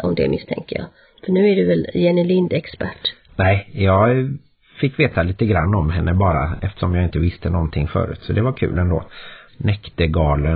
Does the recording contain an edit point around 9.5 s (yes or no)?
yes